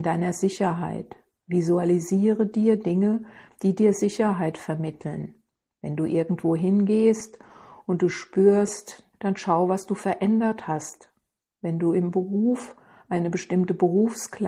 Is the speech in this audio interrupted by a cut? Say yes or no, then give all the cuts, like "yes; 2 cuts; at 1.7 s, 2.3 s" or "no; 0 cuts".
yes; 2 cuts; at 9.1 s, 11.5 s